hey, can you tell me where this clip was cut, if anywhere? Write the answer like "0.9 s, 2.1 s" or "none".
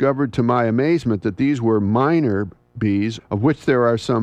3.2 s